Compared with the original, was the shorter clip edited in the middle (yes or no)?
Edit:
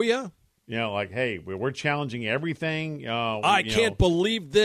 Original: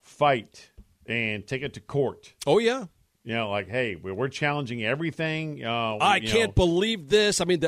no